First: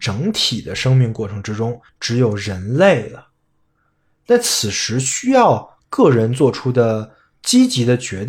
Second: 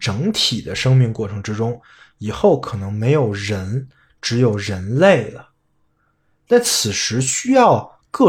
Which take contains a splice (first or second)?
first